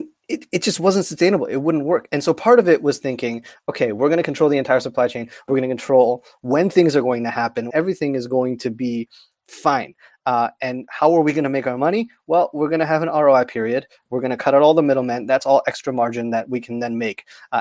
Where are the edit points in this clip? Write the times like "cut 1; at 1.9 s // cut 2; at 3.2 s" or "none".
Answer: cut 1; at 7.7 s